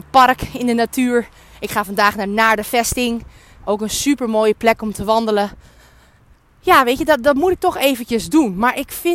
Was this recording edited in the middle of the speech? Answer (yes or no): no